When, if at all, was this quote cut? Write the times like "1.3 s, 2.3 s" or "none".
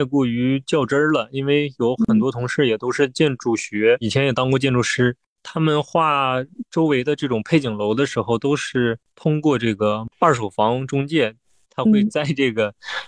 11.6 s